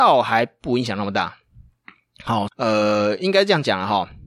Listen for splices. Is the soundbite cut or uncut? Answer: cut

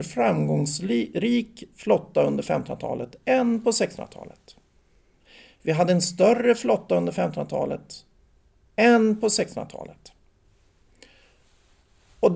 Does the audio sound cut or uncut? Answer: uncut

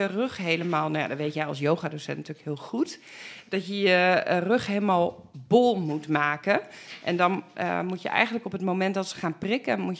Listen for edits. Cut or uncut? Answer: uncut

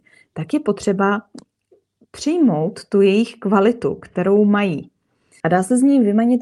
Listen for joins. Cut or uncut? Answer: cut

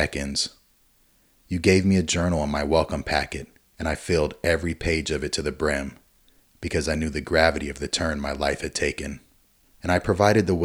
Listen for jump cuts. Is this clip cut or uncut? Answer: cut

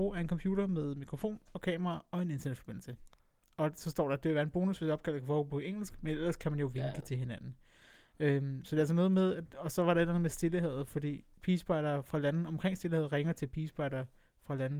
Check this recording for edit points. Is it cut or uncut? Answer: uncut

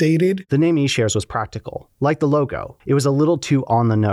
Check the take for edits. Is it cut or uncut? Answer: cut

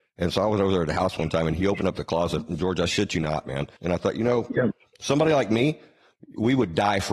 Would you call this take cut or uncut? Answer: cut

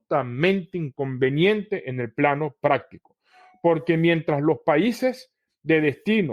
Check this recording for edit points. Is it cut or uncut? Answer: uncut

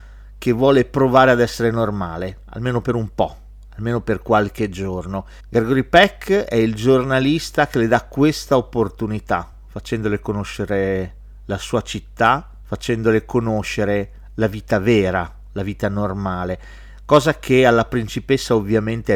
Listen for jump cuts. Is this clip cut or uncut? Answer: uncut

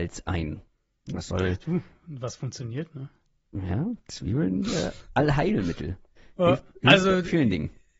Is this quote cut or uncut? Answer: uncut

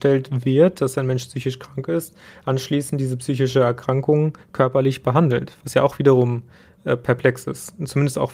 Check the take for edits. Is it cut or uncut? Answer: uncut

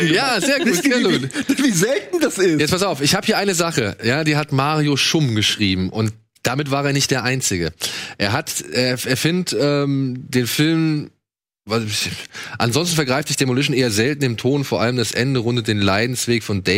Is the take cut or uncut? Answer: uncut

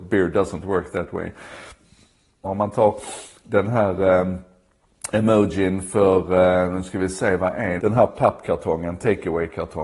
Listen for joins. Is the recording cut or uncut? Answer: cut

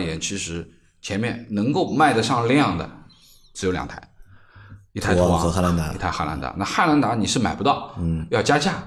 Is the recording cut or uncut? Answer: uncut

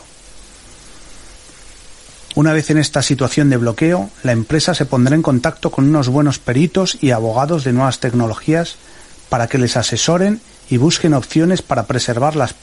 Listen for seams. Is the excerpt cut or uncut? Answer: cut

